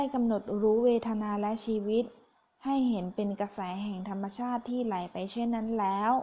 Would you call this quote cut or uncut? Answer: uncut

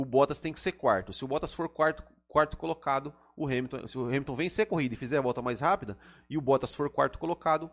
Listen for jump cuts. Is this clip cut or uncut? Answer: uncut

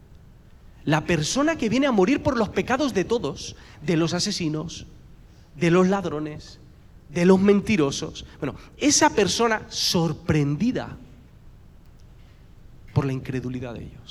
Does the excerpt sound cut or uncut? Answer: uncut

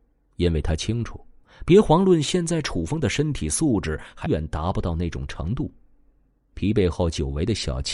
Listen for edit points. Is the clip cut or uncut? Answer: cut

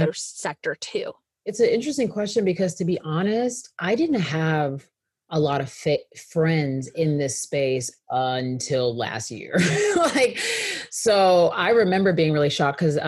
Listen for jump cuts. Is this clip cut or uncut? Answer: uncut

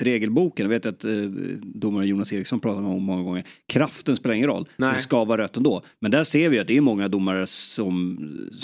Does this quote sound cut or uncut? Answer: uncut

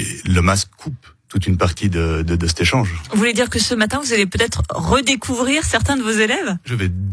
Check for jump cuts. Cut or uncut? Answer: uncut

